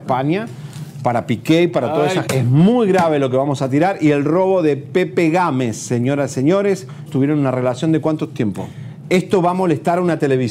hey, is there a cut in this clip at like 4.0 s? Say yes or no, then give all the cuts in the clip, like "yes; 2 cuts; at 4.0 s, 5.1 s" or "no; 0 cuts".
no; 3 cuts; at 2.3 s, 7.1 s, 9.0 s